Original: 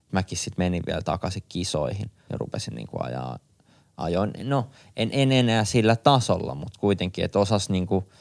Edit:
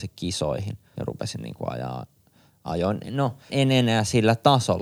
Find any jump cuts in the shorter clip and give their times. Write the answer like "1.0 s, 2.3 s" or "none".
3.5 s